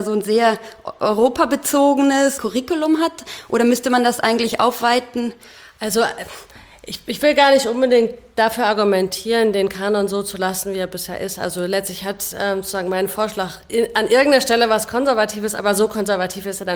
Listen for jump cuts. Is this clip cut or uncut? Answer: uncut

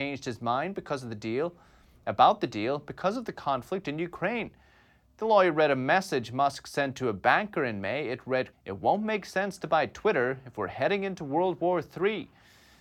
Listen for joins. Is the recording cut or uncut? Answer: cut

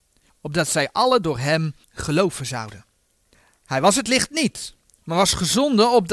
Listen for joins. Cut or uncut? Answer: uncut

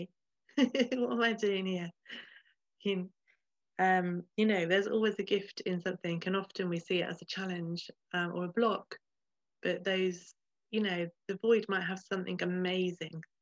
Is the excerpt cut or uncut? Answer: uncut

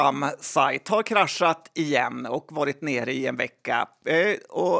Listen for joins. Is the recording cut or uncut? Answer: uncut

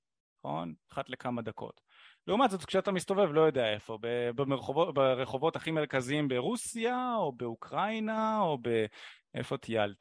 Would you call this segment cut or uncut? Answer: uncut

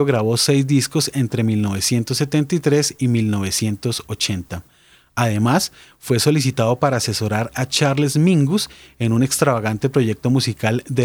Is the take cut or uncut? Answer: uncut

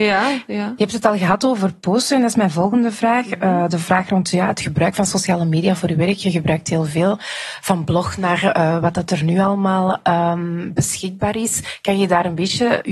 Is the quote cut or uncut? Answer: uncut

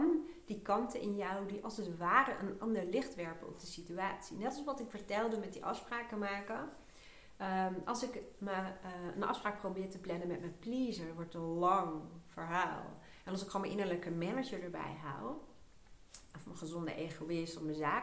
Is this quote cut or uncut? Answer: uncut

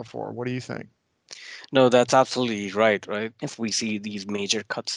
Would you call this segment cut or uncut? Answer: cut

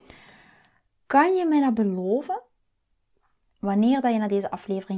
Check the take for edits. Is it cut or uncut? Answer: cut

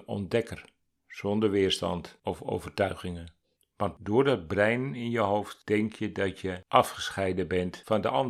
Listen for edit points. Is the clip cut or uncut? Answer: cut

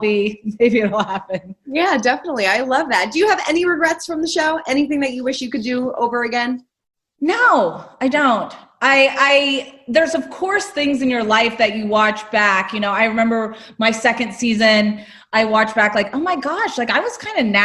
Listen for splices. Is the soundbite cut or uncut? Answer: uncut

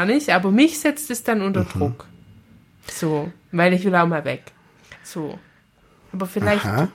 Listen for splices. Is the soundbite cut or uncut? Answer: cut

